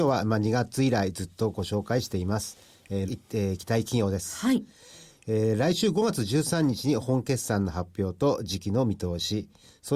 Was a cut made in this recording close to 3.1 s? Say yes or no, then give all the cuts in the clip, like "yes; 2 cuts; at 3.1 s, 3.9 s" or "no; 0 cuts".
yes; 1 cut; at 3.1 s